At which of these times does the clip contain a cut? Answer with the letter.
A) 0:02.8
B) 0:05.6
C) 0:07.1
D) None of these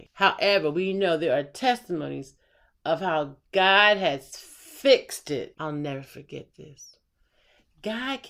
B